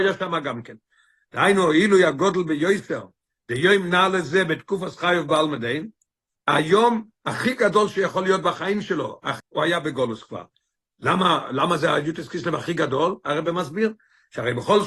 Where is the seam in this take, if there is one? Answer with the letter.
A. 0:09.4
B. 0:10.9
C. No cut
A